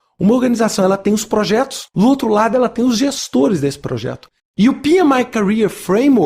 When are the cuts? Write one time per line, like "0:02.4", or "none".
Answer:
0:01.9
0:04.4

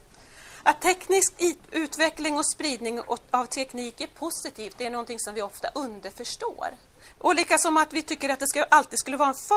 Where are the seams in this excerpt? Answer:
0:07.1

